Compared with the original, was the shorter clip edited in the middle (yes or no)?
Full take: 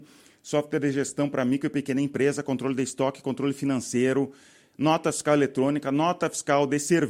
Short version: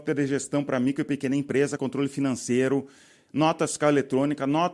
yes